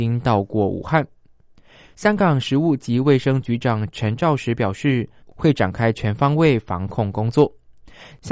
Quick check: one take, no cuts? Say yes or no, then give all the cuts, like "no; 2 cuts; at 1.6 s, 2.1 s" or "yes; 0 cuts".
no; 1 cut; at 5.2 s